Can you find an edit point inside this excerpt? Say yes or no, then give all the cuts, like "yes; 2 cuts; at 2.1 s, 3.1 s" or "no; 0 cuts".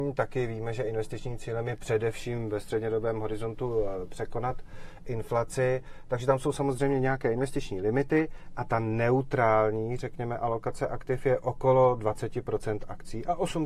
no; 0 cuts